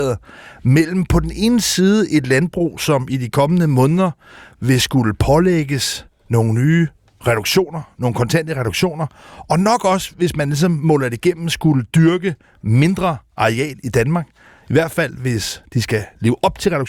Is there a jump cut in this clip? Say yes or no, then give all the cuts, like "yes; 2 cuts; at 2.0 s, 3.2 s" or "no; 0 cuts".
no; 0 cuts